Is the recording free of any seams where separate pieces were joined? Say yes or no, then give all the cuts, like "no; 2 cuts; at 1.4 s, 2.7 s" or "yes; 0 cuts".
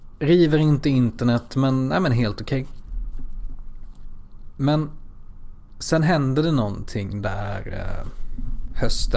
yes; 0 cuts